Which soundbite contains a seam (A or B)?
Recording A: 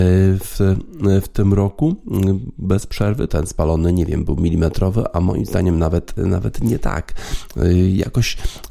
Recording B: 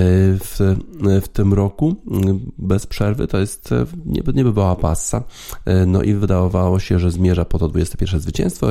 A